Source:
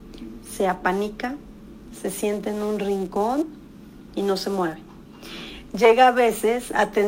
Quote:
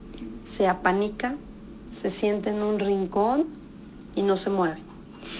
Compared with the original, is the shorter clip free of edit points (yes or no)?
yes